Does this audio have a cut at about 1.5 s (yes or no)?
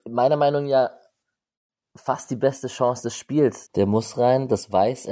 no